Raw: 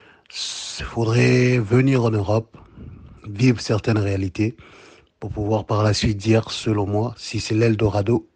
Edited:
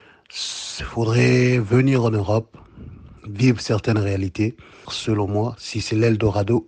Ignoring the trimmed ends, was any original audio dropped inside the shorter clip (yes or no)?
yes